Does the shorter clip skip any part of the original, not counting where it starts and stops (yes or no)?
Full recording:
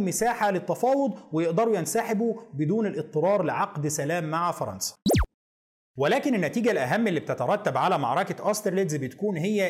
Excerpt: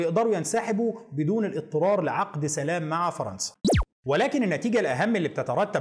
yes